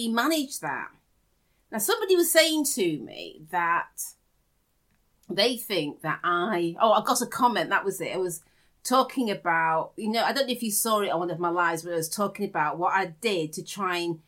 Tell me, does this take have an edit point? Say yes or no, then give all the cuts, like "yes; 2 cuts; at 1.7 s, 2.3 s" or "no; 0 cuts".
no; 0 cuts